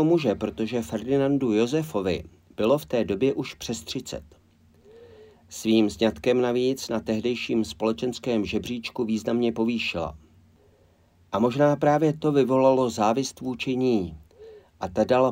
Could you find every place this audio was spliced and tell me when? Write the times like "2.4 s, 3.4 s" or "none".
none